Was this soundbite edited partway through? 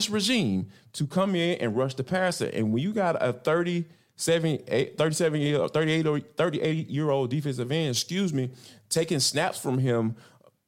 no; 0 cuts

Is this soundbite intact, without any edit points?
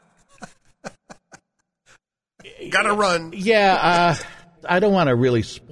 no; 1 cut; at 4.6 s

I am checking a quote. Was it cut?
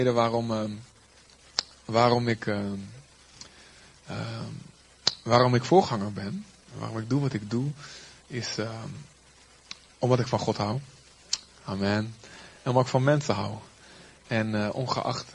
no; 0 cuts

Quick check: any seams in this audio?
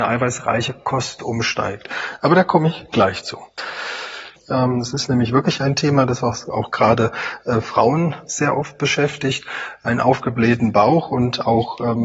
yes; 1 cut; at 4.4 s

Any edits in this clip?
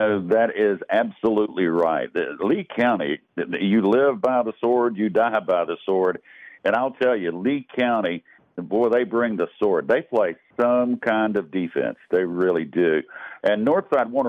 no; 0 cuts

